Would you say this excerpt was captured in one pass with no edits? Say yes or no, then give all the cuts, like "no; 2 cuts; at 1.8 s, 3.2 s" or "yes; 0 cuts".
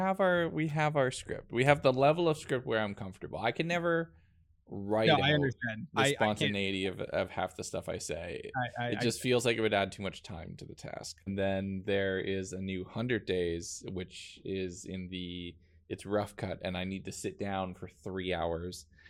no; 1 cut; at 11.3 s